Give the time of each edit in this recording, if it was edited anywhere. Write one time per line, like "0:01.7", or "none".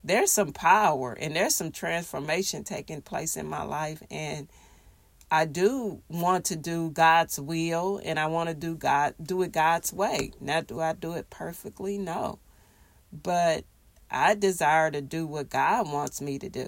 none